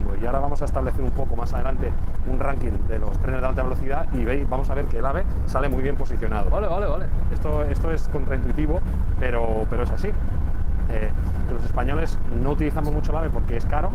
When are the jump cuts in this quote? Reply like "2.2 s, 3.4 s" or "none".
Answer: 7.2 s